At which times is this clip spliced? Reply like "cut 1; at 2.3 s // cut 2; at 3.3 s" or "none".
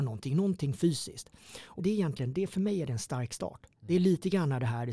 cut 1; at 1.8 s